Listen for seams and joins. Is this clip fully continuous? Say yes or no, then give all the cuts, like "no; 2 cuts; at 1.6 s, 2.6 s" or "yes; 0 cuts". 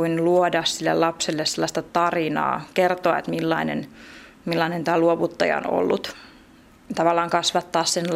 yes; 0 cuts